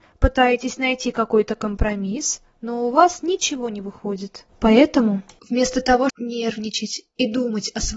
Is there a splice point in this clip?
yes; 2 cuts; at 4.5 s, 6.1 s

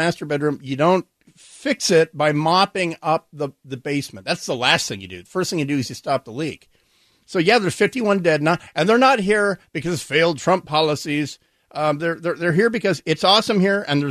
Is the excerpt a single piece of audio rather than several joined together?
yes; 0 cuts

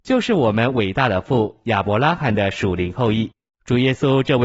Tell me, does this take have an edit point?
yes; 1 cut; at 3.5 s

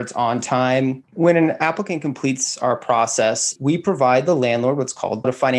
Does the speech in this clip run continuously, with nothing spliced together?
no; 1 cut; at 1.0 s

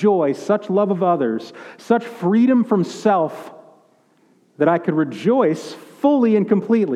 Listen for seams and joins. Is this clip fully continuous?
yes; 0 cuts

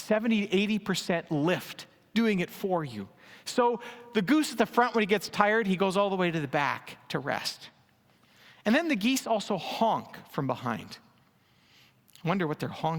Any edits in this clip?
no; 0 cuts

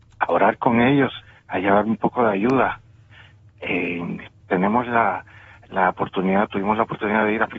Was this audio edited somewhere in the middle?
yes; 1 cut; at 4.4 s

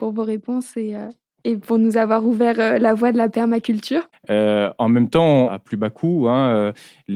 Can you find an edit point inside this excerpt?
yes; 2 cuts; at 4.1 s, 5.5 s

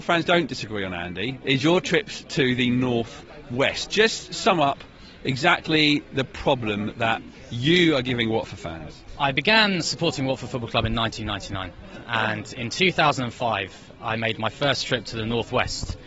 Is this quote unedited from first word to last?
no; 1 cut; at 1.4 s

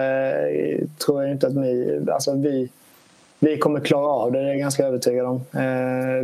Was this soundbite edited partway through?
no; 0 cuts

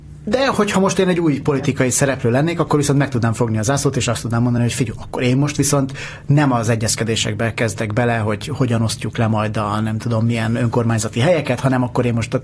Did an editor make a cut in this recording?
no; 0 cuts

